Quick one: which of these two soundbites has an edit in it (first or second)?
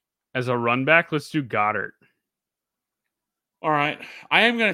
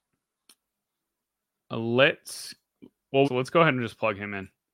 second